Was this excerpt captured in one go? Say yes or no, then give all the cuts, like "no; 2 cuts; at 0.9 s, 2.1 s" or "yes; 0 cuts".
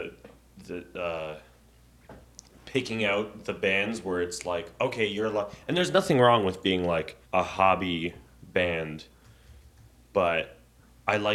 no; 1 cut; at 7.2 s